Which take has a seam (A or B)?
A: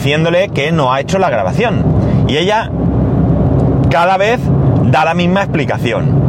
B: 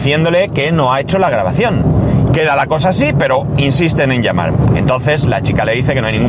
B